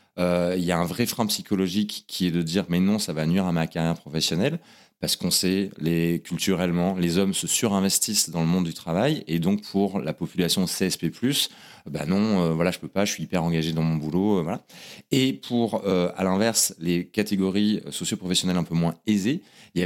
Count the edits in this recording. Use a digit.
0